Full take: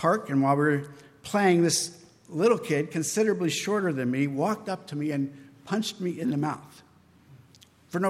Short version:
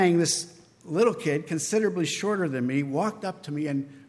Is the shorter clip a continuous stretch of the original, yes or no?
yes